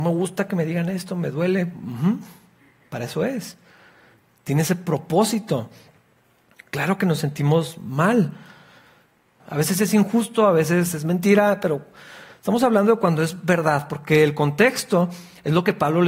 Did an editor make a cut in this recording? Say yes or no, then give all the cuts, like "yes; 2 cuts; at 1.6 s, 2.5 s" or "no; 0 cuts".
yes; 1 cut; at 9.4 s